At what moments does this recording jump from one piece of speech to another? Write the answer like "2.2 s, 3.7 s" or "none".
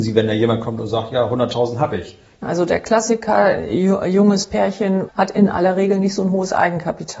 2.4 s, 5.1 s